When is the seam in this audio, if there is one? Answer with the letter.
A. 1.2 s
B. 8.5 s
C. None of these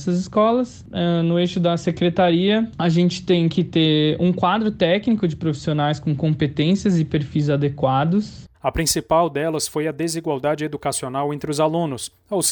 B